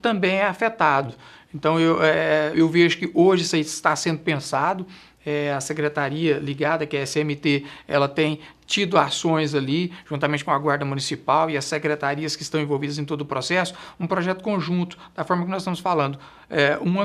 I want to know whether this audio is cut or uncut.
cut